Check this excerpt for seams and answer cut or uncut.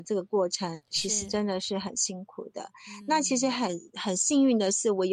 uncut